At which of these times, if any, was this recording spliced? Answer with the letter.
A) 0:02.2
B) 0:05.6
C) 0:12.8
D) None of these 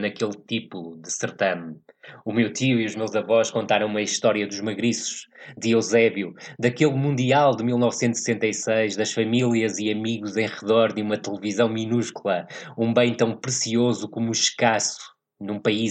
D